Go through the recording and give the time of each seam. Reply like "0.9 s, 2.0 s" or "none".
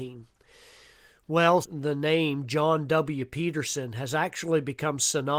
1.6 s